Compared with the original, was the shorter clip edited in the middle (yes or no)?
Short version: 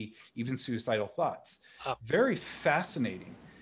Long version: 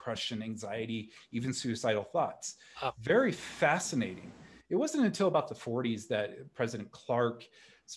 no